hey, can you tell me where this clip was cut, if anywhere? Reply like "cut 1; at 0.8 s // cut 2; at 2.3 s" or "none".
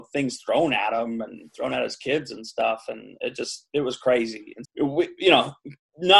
cut 1; at 4.6 s